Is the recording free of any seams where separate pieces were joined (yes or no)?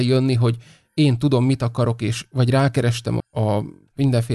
no